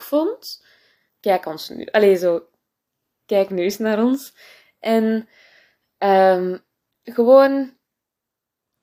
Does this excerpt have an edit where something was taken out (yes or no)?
yes